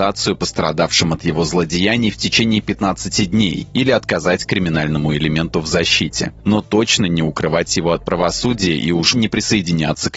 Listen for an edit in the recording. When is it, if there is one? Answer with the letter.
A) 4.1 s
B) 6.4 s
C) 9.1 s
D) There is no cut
C